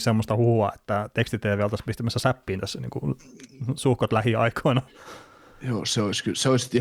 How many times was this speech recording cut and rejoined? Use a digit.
0